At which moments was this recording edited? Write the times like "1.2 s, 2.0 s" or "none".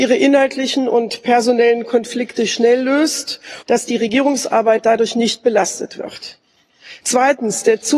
3.6 s, 7.0 s